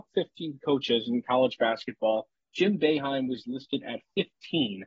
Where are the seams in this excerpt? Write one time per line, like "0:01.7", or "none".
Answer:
none